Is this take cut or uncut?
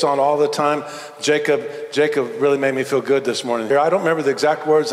cut